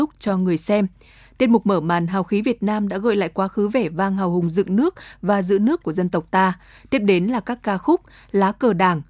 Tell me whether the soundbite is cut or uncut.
uncut